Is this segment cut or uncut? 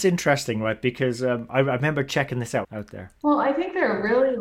cut